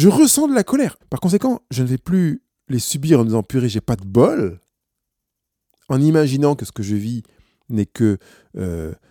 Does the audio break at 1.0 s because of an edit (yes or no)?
yes